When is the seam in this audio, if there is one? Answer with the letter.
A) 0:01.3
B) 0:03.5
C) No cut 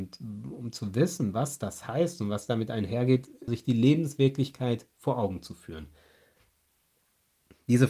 B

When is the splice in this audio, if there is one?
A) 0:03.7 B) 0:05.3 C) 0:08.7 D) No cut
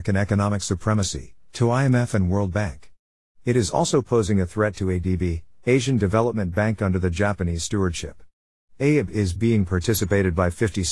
D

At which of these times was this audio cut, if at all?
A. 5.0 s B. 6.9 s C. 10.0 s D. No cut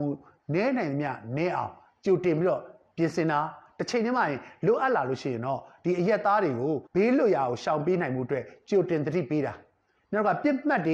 B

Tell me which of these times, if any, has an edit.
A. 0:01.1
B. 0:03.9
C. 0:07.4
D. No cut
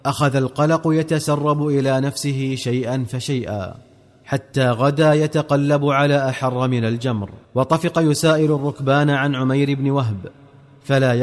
C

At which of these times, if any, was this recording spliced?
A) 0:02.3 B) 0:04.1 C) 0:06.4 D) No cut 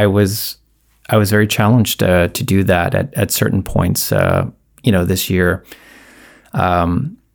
D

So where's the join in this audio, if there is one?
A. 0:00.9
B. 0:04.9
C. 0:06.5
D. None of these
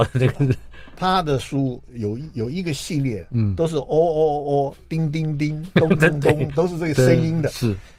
C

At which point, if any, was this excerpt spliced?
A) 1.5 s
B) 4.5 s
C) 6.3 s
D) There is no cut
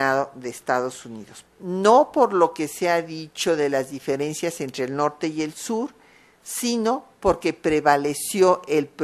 A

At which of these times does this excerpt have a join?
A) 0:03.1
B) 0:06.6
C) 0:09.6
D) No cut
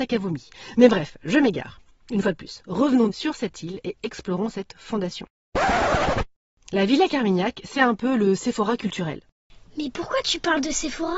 A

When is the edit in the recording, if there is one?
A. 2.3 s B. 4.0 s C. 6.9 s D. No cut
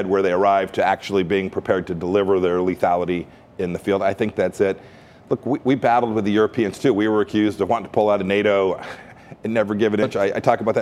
D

